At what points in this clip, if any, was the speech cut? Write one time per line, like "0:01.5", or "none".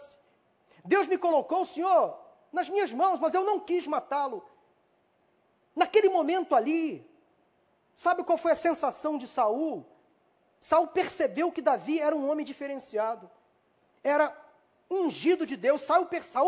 none